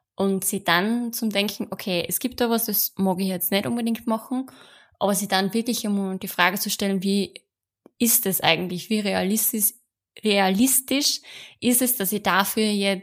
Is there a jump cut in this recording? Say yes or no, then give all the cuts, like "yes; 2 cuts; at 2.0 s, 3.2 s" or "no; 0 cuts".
no; 0 cuts